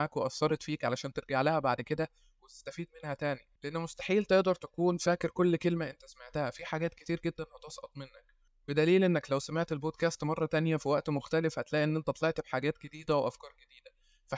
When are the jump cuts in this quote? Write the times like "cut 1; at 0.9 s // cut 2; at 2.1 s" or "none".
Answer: cut 1; at 3.6 s